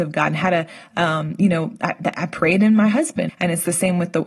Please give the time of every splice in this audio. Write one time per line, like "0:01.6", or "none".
0:03.3